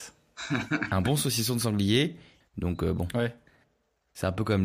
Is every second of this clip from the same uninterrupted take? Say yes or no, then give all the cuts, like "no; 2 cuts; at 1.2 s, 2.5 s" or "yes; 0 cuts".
no; 1 cut; at 2.4 s